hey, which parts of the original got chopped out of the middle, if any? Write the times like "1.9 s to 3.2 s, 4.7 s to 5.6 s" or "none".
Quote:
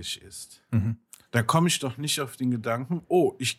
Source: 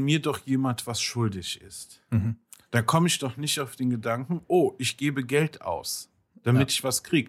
none